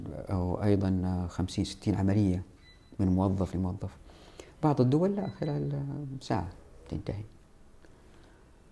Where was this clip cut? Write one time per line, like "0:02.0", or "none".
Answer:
0:03.5